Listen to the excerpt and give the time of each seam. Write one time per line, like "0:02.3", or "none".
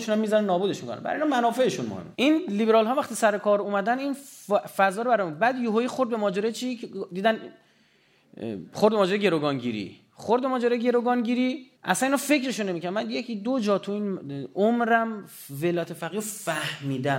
0:02.1
0:11.8